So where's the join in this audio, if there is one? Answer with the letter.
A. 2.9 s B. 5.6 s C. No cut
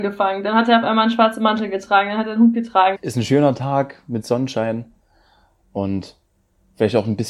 A